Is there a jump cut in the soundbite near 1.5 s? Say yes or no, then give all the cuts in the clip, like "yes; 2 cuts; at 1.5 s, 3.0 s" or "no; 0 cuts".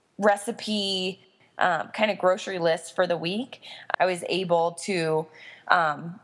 no; 1 cut; at 4.0 s